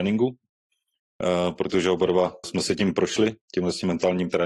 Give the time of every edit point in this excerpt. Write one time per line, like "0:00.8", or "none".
0:02.4